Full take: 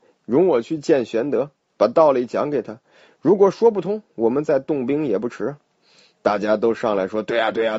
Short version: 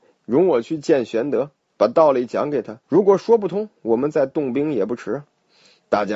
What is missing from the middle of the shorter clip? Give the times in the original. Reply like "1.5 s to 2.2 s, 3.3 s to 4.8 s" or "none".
2.8 s to 3.2 s